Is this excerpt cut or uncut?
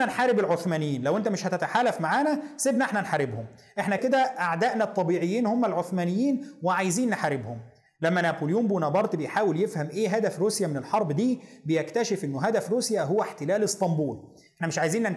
cut